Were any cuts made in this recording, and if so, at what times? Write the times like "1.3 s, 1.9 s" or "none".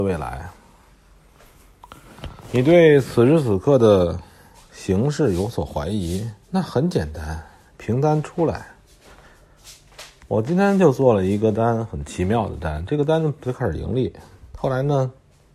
6.4 s